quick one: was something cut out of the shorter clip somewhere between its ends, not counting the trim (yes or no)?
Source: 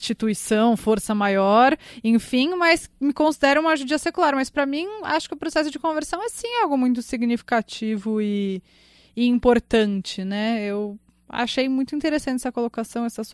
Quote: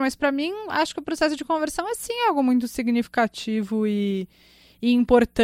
no